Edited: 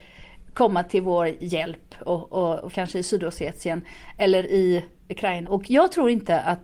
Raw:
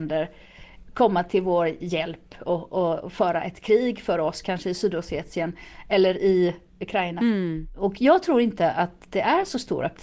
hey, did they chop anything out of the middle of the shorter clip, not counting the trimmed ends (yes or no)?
yes